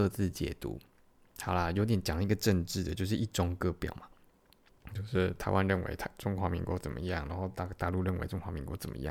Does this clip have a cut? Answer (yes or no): no